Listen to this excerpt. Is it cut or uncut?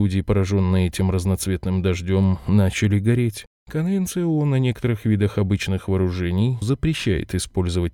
cut